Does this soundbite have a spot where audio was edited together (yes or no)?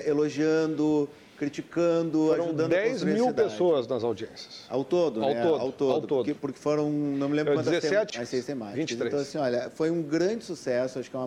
yes